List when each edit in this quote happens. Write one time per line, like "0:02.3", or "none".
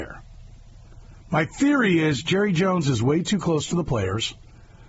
none